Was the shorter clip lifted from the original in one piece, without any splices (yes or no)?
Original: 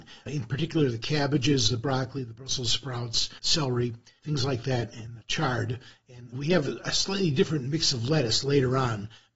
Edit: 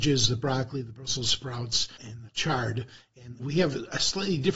no